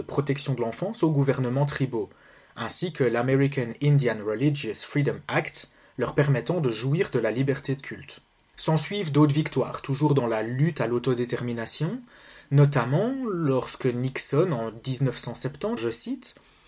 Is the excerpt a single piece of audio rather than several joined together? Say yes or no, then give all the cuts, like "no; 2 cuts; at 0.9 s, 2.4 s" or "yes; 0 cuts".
no; 2 cuts; at 8.5 s, 15.8 s